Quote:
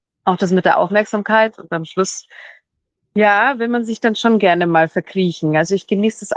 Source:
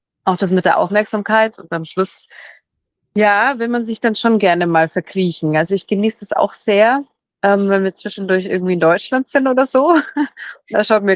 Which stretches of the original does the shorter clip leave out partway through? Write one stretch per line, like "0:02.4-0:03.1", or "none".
none